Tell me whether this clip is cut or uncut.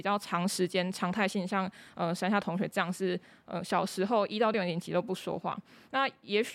uncut